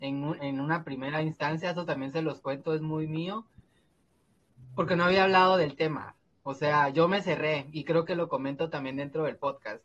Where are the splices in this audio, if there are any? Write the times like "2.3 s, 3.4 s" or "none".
none

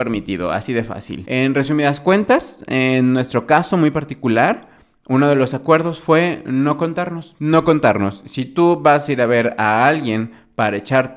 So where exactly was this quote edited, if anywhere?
none

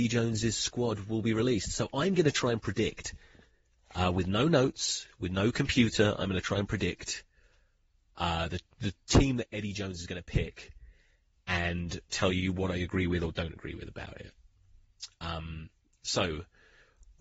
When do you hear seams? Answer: none

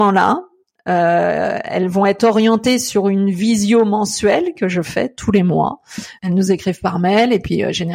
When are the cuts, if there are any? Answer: 6.2 s

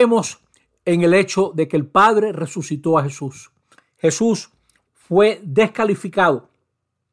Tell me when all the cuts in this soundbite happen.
3.8 s

